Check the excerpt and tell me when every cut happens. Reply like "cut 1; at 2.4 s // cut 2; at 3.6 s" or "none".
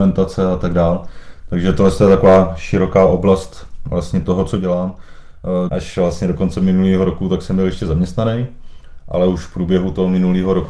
cut 1; at 5.7 s

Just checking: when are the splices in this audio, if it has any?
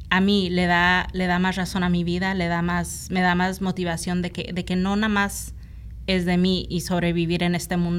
none

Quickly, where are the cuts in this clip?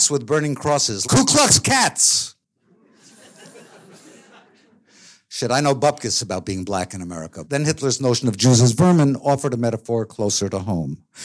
cut 1; at 1.0 s // cut 2; at 7.4 s

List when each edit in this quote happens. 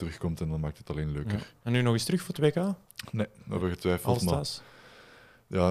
none

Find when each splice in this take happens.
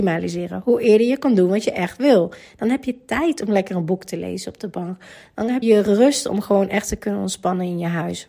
cut 1; at 5.6 s

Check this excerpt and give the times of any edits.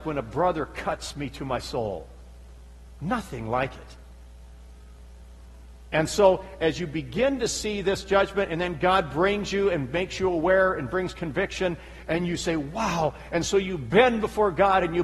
none

